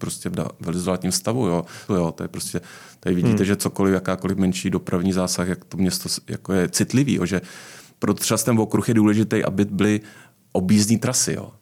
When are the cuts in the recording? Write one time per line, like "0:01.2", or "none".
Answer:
0:01.9